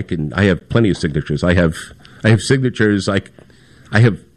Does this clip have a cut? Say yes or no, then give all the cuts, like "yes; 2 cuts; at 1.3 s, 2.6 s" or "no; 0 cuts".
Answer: no; 0 cuts